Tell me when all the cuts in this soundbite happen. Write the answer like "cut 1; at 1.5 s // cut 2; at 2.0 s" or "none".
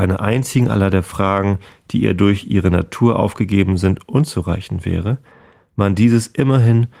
none